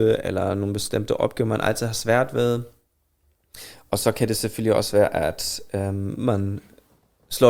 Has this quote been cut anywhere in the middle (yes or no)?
no